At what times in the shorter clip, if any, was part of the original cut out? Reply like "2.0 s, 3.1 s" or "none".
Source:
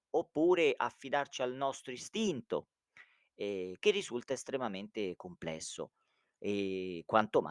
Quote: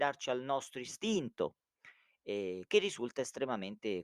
none